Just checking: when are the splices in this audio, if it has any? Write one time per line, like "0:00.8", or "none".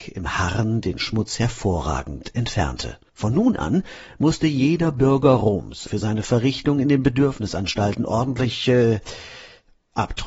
0:05.9

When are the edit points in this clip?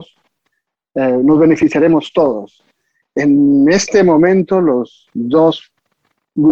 none

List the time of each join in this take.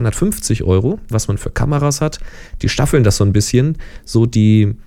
0:01.1

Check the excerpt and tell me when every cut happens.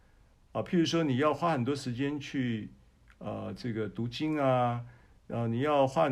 none

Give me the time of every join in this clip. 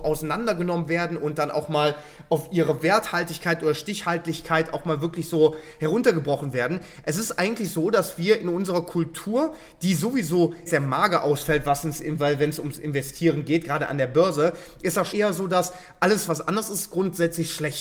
0:10.7
0:15.1
0:16.3

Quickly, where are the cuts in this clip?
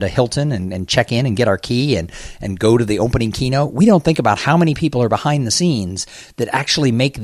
none

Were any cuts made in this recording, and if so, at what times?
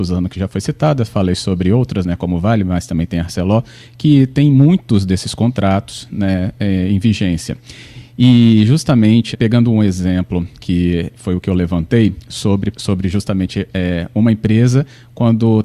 0:09.3
0:12.7

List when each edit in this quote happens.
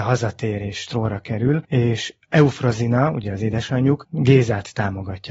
0:01.6
0:04.0

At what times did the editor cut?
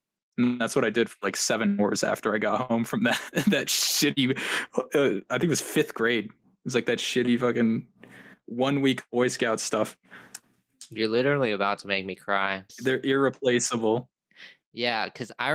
0:12.7

